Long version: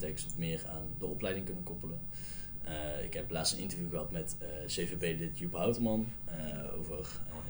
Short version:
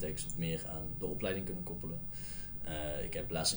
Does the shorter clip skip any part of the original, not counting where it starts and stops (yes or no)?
no